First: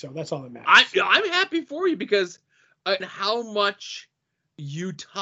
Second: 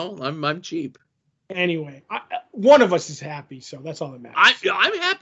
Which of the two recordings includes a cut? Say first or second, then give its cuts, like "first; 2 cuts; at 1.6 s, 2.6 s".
first; 1 cut; at 3.0 s